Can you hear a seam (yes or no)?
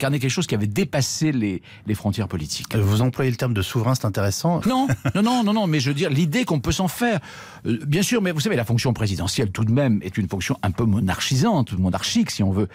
yes